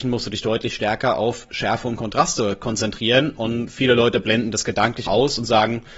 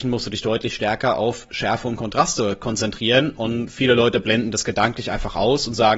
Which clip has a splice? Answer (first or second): first